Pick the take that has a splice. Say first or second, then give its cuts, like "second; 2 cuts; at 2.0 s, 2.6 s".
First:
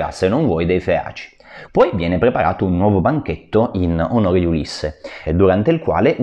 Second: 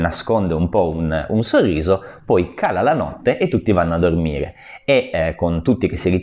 first; 2 cuts; at 1.7 s, 5.3 s